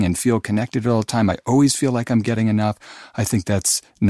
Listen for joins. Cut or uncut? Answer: uncut